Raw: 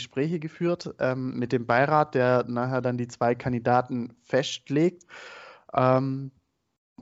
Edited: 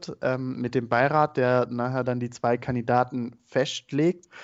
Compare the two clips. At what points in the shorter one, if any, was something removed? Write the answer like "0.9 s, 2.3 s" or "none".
none